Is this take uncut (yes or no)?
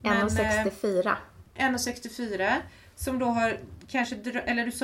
yes